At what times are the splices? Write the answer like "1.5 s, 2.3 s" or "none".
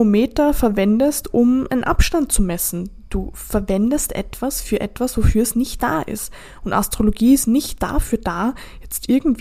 none

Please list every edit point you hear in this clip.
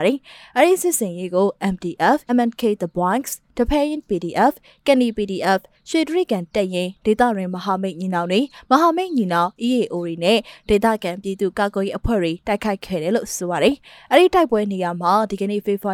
2.3 s

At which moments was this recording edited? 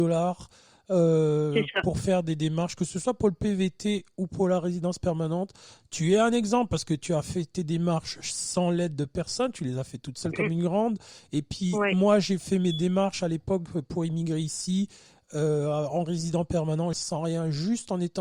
16.9 s

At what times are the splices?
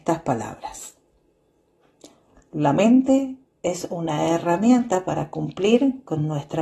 none

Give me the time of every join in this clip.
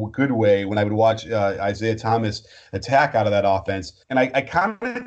4.0 s

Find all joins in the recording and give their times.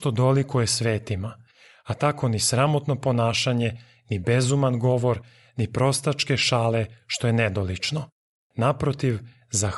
none

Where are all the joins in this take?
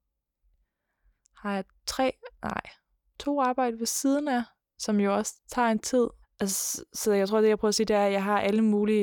6.2 s

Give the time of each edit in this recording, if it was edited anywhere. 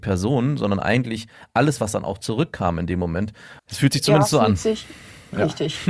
1.8 s, 3.6 s

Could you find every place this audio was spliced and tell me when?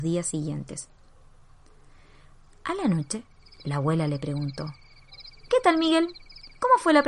none

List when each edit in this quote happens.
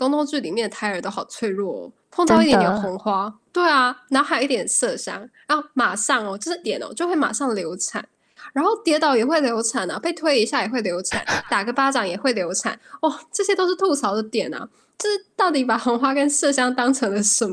6.6 s

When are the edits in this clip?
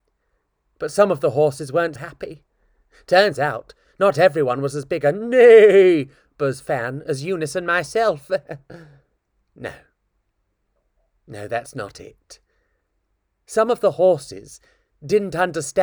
2.0 s

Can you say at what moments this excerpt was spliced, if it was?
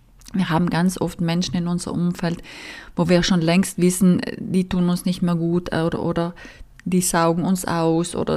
none

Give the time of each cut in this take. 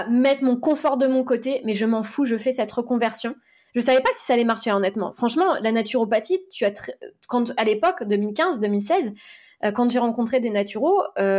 none

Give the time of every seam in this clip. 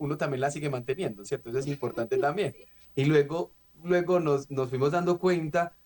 2.8 s

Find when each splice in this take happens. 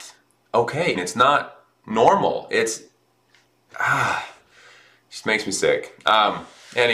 0.9 s

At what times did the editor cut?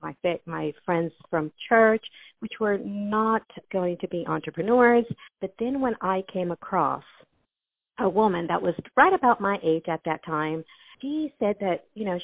5.3 s, 11.0 s

